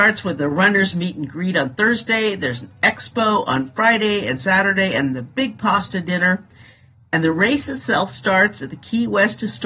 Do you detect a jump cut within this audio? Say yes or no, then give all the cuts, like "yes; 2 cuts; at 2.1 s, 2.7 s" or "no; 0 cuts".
no; 0 cuts